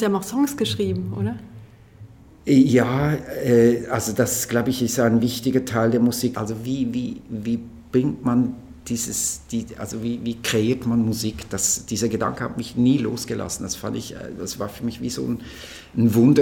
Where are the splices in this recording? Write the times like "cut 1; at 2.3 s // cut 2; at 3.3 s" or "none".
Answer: cut 1; at 6.3 s